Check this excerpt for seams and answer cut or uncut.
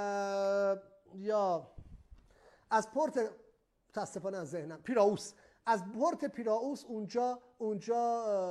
uncut